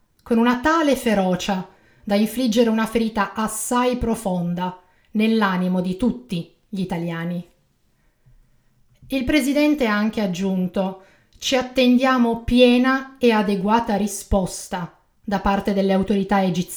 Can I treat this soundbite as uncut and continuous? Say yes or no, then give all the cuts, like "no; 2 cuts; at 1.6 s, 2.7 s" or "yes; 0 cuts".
yes; 0 cuts